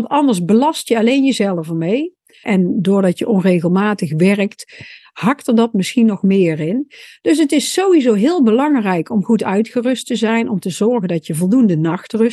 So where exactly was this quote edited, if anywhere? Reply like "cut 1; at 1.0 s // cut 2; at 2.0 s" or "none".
cut 1; at 2.4 s